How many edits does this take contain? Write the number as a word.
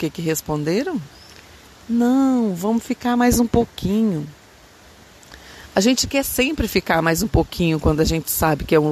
zero